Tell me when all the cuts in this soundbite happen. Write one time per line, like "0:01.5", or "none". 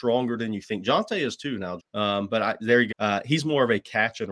0:01.8
0:02.9